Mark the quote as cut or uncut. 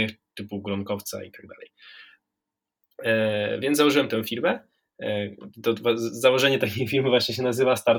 uncut